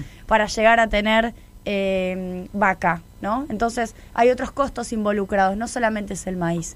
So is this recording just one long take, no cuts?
yes; 0 cuts

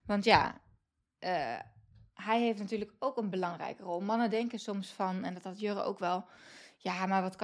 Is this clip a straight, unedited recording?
yes; 0 cuts

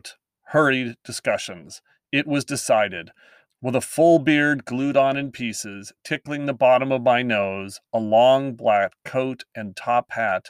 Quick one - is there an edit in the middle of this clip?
yes; 1 cut; at 3.5 s

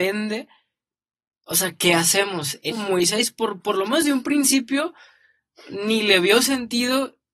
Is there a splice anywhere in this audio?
yes; 1 cut; at 2.7 s

